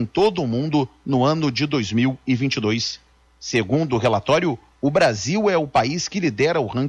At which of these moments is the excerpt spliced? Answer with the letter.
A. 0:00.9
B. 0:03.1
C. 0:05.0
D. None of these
D